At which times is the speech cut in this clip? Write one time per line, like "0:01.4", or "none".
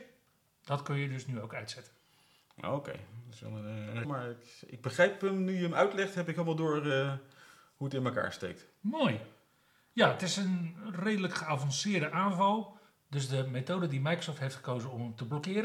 0:04.0